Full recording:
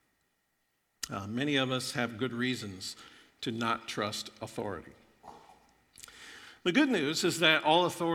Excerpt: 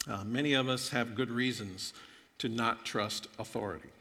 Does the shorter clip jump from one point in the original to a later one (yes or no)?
no